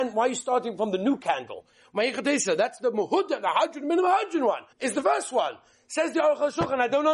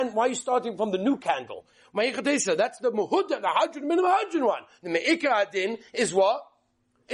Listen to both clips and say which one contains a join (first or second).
first